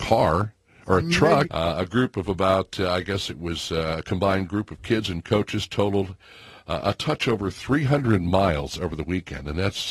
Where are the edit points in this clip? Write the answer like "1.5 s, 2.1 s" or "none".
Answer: 1.4 s